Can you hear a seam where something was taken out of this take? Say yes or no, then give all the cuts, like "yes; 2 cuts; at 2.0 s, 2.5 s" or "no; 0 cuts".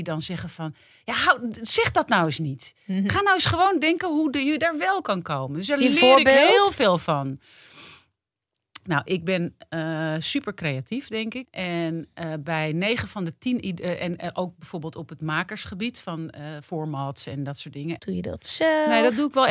yes; 2 cuts; at 11.4 s, 18.0 s